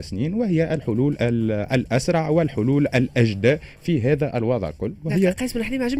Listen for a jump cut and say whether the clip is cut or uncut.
uncut